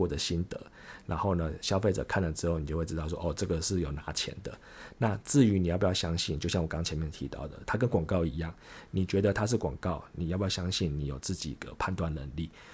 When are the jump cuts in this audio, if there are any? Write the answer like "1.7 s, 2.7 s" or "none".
none